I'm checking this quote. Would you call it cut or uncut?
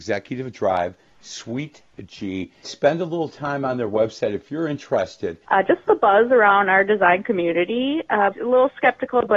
cut